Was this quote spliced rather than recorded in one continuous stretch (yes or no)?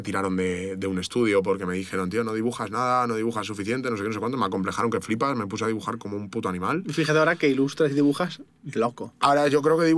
no